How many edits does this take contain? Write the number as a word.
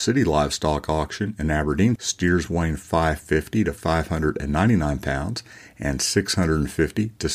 one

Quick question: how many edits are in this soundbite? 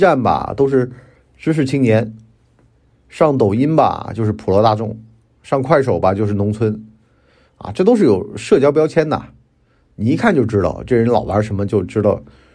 zero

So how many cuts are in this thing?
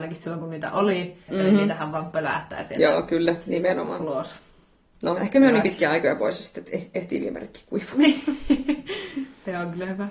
one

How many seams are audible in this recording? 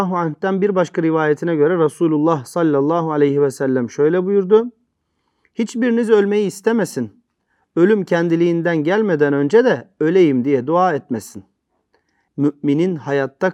one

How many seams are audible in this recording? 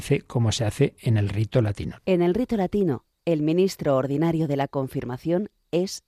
one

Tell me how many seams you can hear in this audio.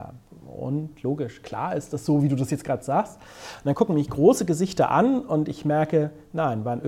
zero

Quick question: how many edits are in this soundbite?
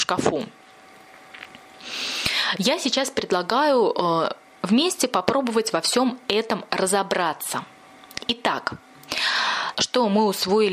one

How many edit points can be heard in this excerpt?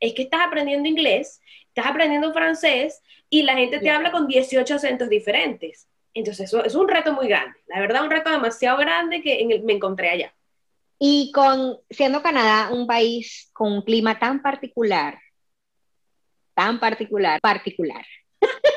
one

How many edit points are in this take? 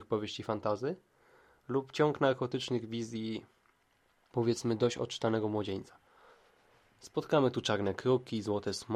zero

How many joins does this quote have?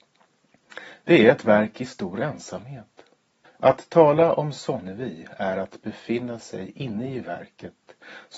one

